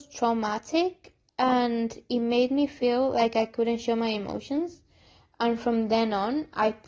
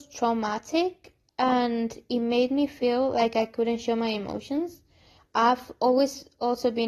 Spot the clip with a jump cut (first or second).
second